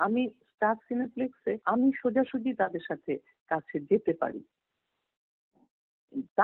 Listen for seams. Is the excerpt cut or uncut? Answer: cut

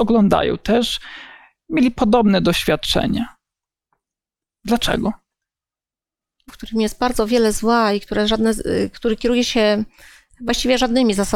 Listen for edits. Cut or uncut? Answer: cut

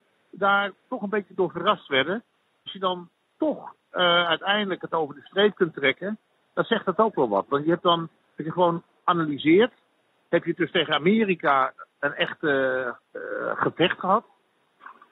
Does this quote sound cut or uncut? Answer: uncut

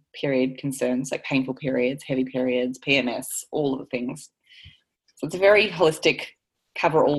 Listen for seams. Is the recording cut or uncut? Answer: uncut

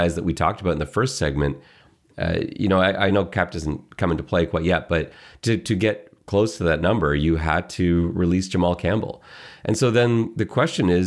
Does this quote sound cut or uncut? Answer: uncut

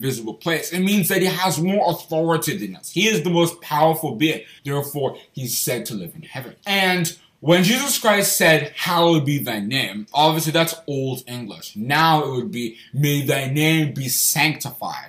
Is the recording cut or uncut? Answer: cut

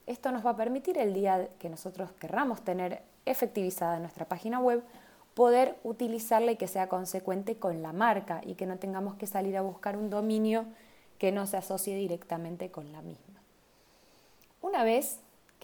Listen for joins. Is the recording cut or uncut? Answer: uncut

